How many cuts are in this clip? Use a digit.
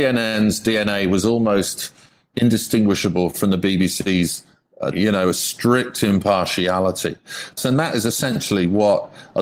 2